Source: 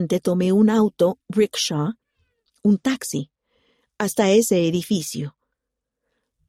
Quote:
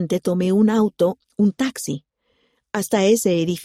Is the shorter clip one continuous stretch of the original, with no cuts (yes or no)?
no